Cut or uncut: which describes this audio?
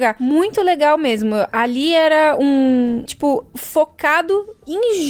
cut